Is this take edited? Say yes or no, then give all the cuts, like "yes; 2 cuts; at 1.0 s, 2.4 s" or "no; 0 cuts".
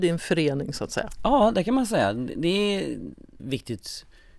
yes; 1 cut; at 3.4 s